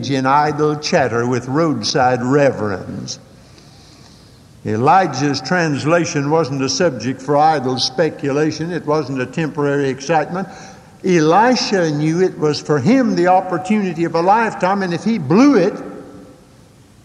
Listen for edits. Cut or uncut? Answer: uncut